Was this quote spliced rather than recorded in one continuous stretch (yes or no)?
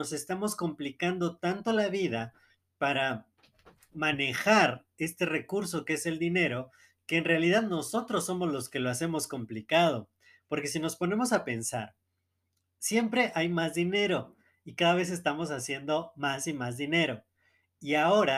no